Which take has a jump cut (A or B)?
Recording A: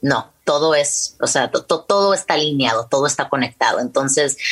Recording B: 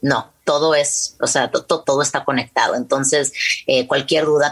B